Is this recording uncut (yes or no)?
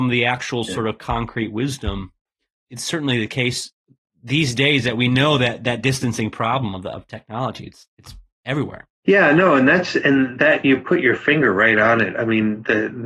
yes